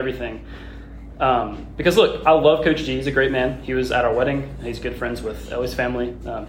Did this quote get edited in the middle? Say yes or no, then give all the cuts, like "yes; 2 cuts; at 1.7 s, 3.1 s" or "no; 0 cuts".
no; 0 cuts